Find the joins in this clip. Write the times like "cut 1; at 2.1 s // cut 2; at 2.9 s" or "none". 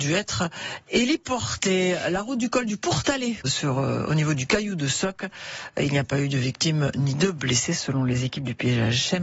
cut 1; at 3.4 s